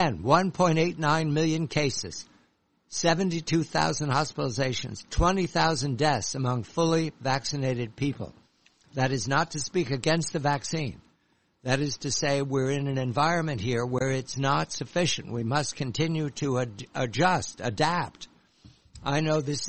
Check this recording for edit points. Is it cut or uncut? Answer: uncut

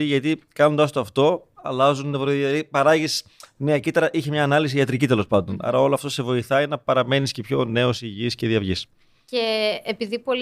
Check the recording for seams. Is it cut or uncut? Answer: uncut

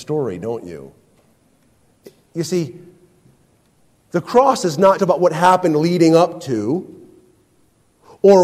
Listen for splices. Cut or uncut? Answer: cut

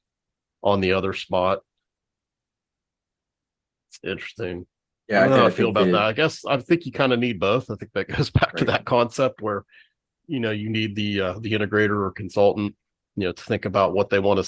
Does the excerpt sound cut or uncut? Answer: uncut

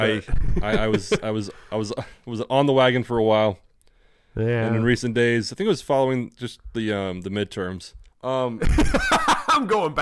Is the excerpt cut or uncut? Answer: cut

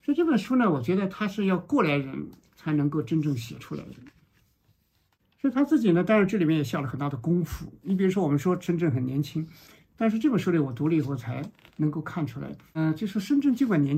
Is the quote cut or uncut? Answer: uncut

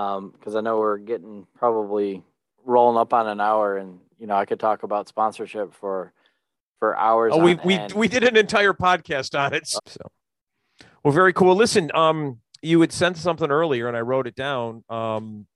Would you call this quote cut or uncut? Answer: cut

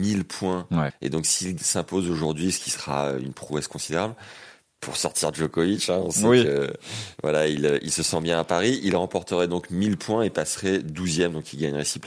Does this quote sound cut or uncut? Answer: cut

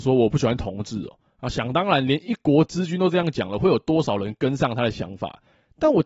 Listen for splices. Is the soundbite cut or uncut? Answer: uncut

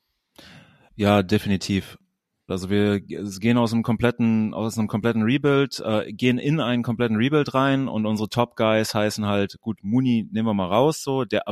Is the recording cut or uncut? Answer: cut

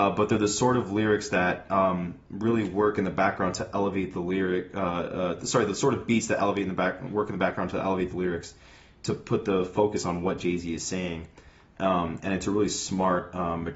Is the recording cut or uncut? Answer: uncut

